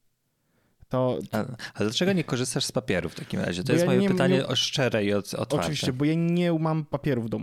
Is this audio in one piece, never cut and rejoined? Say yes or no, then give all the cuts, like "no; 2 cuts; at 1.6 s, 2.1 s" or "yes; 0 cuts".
yes; 0 cuts